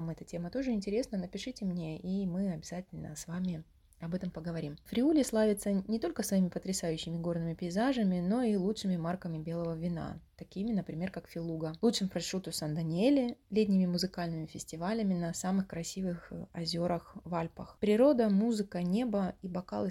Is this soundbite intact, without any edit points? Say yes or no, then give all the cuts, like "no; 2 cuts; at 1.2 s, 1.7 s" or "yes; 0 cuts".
yes; 0 cuts